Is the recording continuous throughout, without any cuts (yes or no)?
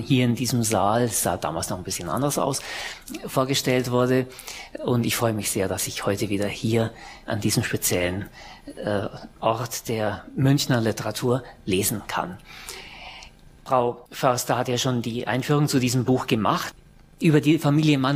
yes